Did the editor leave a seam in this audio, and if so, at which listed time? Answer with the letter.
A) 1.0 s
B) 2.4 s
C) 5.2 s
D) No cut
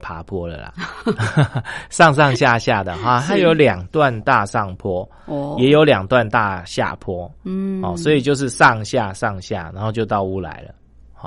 D